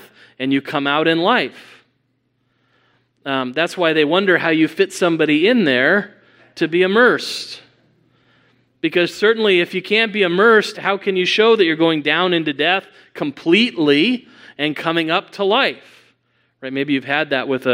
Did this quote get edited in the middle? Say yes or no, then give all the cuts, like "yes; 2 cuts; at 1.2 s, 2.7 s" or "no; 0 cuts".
yes; 1 cut; at 10.7 s